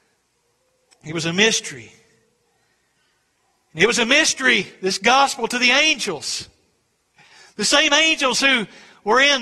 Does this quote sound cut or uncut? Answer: uncut